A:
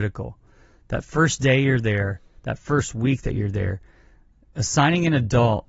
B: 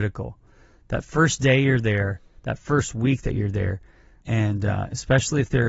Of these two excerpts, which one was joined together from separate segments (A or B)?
B